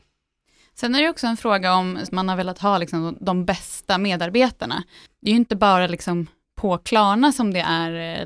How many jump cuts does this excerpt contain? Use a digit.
1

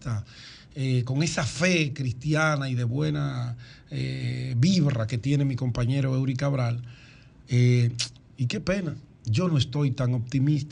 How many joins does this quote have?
0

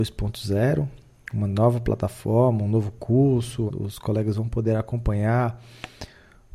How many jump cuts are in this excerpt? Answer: 1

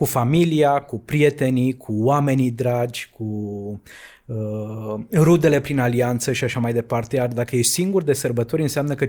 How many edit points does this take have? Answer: 0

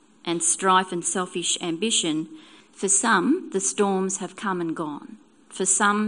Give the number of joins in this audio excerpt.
1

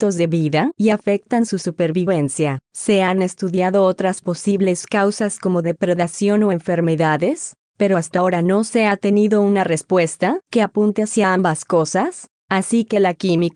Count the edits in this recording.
1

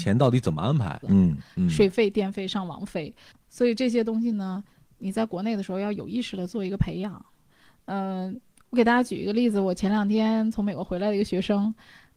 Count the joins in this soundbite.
1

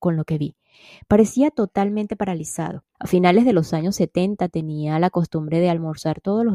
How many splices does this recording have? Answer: 1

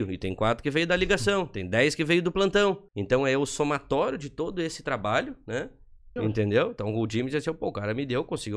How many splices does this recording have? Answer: 2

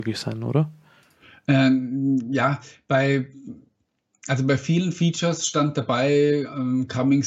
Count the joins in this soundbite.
0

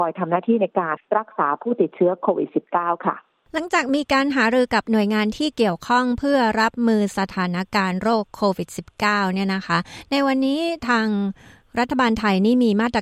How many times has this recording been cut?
1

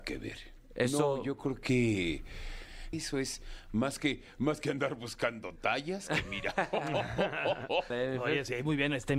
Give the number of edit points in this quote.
2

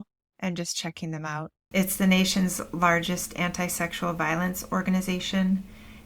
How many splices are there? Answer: 1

